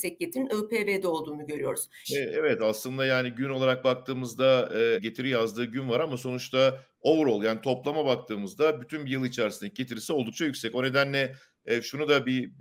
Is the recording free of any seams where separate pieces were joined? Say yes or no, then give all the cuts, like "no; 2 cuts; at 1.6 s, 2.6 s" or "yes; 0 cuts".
no; 2 cuts; at 2.0 s, 5.0 s